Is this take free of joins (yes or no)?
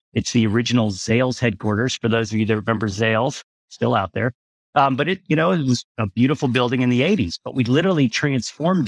yes